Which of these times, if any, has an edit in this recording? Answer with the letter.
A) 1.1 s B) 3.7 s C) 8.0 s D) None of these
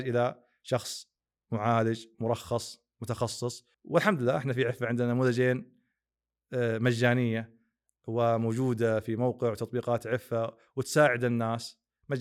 B